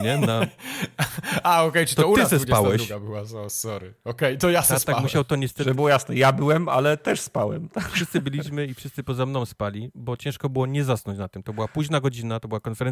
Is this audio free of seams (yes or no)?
yes